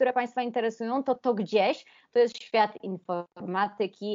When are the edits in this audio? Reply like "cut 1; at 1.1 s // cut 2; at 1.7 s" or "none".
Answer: cut 1; at 1.2 s